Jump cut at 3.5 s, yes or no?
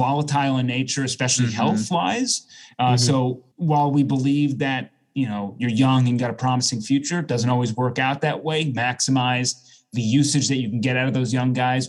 yes